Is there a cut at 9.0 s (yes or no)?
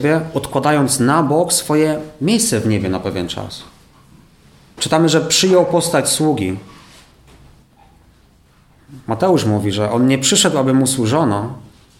no